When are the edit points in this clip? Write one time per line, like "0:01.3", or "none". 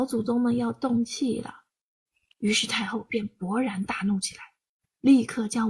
none